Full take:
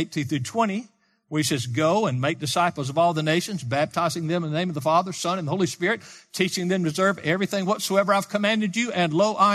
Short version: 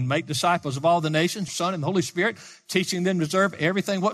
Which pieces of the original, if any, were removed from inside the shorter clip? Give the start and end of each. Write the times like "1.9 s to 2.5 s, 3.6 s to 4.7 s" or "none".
3.6 s to 5.1 s